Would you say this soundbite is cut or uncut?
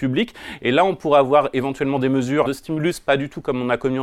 cut